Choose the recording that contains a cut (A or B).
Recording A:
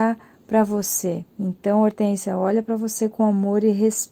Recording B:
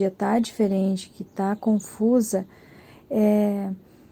A